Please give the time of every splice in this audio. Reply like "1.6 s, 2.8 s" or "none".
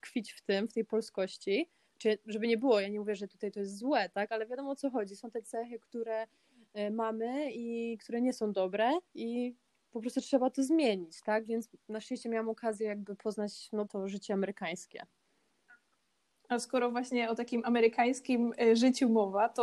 9.1 s, 13.9 s